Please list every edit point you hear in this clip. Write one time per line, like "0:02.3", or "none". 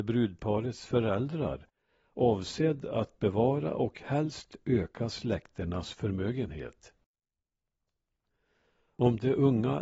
none